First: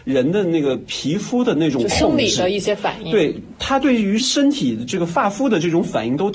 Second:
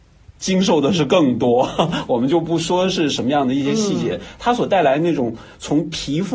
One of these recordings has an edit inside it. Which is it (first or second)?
first